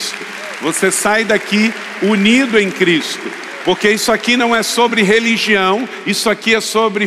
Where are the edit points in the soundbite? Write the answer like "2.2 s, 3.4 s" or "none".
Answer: none